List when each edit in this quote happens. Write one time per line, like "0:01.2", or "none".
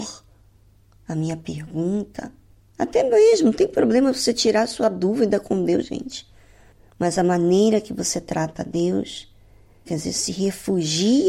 0:05.8
0:09.9